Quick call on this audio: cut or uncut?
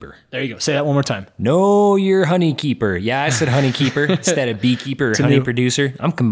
uncut